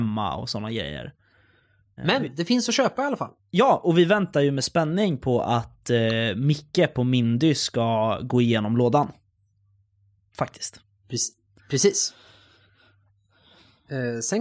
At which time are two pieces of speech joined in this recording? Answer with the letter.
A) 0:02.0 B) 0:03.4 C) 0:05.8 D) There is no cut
A